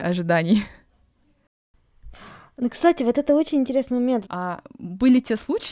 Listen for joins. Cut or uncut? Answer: cut